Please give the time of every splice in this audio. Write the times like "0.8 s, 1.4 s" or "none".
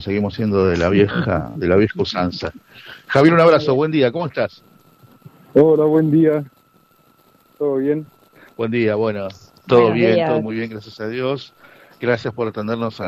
none